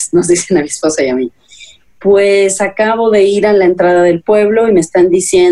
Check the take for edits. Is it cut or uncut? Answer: uncut